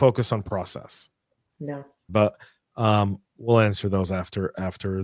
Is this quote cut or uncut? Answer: cut